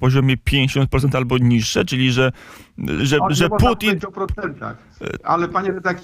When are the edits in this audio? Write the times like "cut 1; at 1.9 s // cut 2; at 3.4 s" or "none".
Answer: cut 1; at 3.0 s